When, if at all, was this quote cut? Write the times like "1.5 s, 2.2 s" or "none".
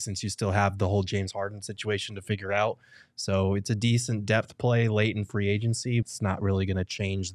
6.0 s